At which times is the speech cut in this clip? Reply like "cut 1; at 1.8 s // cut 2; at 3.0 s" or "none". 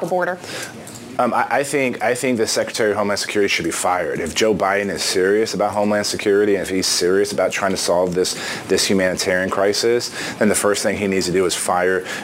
none